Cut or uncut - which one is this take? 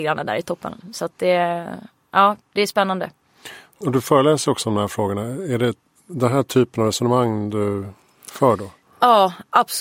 uncut